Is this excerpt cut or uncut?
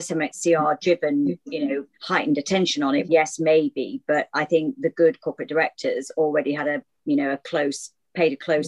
cut